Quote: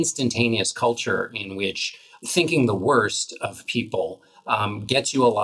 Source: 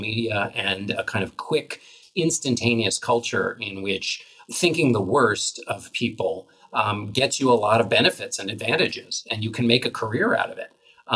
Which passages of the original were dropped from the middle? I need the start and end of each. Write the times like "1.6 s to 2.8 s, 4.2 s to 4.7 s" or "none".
none